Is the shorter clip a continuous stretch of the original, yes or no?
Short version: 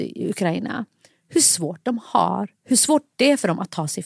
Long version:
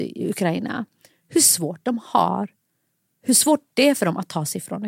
no